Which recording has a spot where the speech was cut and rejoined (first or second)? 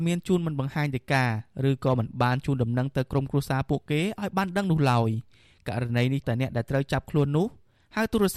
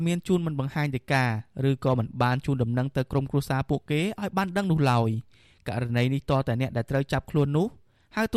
first